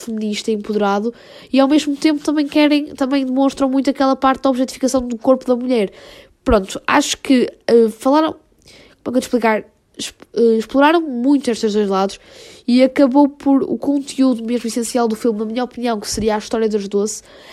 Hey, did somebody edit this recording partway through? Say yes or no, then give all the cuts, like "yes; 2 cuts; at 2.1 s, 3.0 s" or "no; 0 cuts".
no; 0 cuts